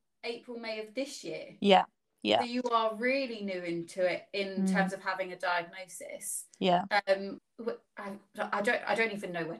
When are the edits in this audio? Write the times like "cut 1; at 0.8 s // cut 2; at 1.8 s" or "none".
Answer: cut 1; at 7.4 s